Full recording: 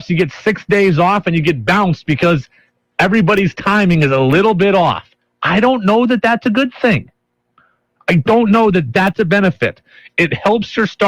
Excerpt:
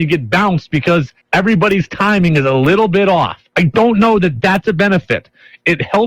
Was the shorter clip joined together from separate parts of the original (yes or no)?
yes